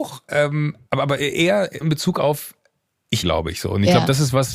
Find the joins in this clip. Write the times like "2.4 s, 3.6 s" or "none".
1.8 s, 3.2 s